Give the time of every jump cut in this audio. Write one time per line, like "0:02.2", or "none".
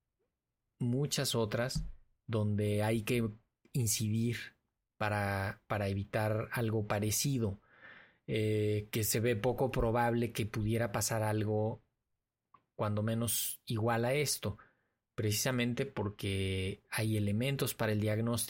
none